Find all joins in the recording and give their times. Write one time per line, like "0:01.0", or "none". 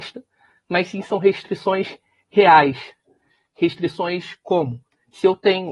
none